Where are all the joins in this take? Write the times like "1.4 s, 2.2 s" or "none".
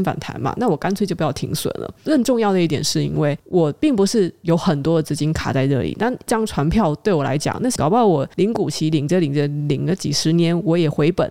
7.8 s